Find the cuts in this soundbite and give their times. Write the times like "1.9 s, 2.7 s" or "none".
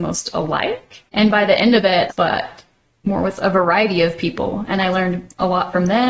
1.1 s, 2.1 s